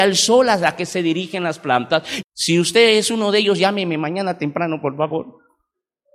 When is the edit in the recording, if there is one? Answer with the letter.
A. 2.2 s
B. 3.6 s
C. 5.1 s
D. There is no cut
A